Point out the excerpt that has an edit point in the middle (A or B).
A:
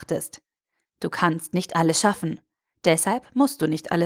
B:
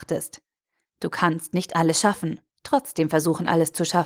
B